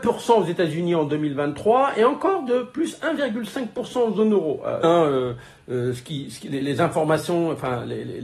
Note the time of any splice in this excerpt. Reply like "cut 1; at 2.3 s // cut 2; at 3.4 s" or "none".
cut 1; at 4.8 s // cut 2; at 6.6 s